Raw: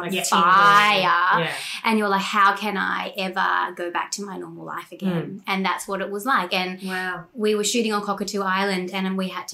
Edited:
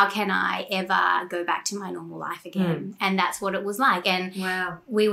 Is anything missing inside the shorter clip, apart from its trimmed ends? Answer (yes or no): no